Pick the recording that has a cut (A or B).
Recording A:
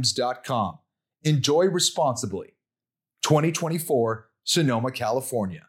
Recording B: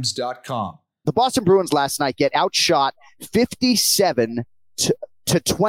B